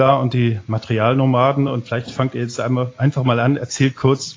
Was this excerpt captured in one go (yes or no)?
yes